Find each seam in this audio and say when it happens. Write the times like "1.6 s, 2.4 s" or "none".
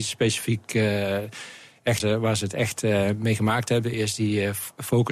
2.0 s, 3.9 s